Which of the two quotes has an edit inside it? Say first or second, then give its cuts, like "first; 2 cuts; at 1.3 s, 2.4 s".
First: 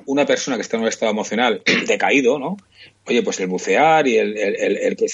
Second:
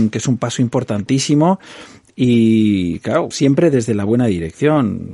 second; 1 cut; at 3.3 s